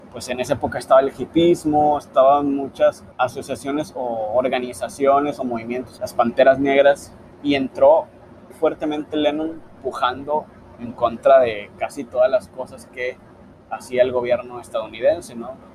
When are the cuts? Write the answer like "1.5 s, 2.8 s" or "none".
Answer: 3.1 s, 6.0 s, 8.5 s